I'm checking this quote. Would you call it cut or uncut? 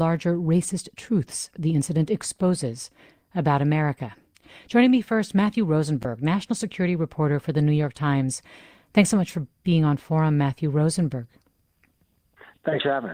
uncut